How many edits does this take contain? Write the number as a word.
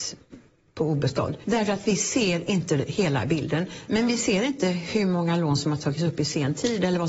two